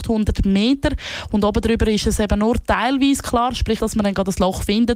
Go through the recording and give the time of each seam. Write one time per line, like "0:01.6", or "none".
0:03.8